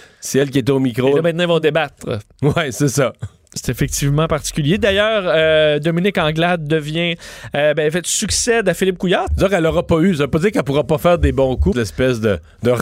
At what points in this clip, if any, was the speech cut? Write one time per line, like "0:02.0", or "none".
0:09.3
0:11.7